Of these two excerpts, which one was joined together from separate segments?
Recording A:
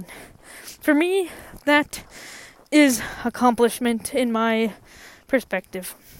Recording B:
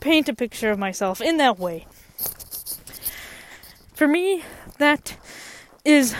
B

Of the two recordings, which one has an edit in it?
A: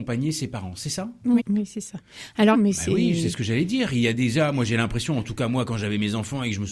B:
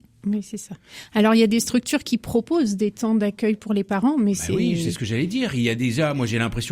A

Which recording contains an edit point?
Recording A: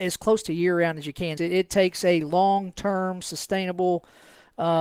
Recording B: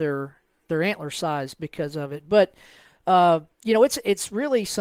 A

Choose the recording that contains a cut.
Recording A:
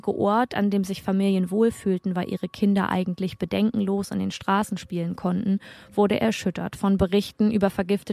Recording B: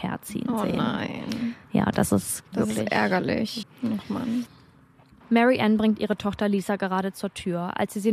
B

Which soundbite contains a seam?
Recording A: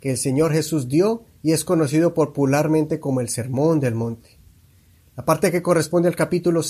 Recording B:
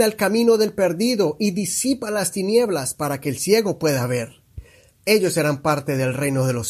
B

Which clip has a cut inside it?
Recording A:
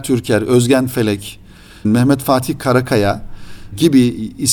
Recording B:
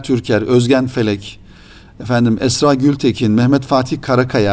A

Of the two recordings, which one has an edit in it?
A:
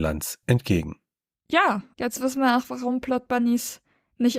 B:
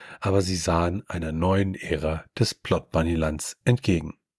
A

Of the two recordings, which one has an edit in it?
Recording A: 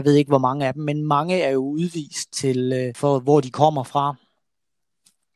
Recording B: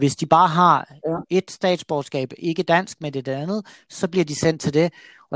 A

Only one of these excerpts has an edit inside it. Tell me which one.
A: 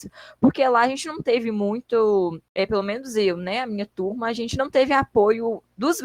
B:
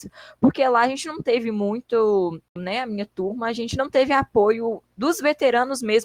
B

